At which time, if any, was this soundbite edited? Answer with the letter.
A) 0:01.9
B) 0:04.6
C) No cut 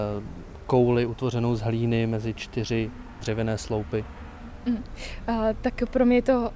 B